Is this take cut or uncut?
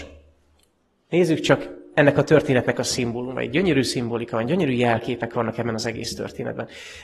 uncut